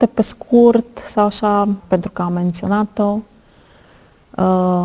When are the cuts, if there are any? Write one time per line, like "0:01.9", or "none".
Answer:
0:01.8